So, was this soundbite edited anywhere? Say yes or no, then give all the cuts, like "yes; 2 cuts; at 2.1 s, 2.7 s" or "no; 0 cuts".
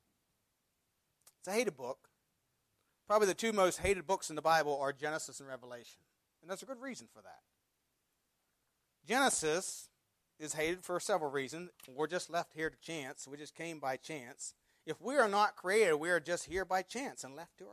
yes; 1 cut; at 11.7 s